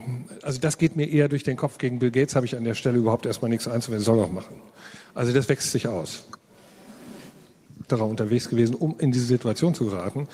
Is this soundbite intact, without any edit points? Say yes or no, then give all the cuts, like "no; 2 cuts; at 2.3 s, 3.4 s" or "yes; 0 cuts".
no; 1 cut; at 7.9 s